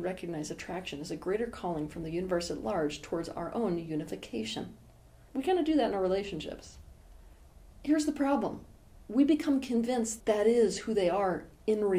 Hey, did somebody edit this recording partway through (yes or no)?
yes